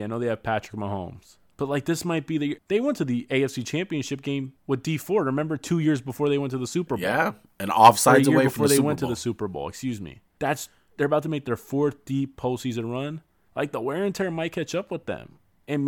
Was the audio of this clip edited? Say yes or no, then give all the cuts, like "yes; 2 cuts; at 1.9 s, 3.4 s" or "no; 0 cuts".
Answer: yes; 1 cut; at 2.6 s